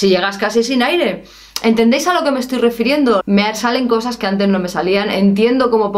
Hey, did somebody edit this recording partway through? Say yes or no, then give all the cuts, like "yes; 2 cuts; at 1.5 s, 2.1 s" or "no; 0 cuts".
yes; 1 cut; at 3.2 s